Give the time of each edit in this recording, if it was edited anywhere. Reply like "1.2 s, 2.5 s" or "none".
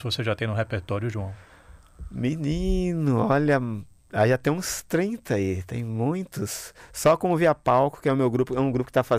none